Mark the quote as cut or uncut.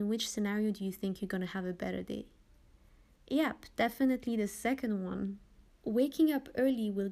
uncut